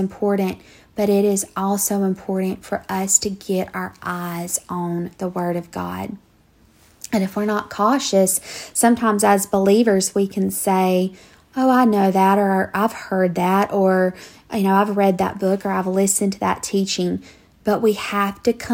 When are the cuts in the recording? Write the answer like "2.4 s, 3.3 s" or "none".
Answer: none